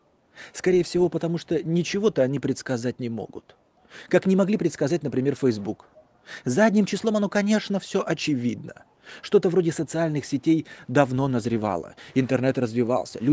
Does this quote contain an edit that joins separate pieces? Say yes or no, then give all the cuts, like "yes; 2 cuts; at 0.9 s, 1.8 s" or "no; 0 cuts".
no; 0 cuts